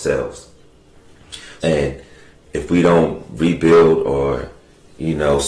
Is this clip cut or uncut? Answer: cut